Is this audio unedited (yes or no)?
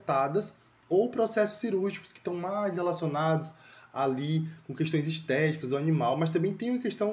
yes